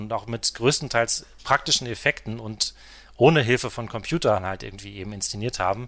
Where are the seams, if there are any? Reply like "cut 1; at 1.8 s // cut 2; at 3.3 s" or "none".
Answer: none